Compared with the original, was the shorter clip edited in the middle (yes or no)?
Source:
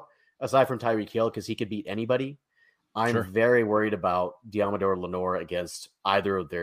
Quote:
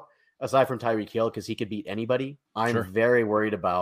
yes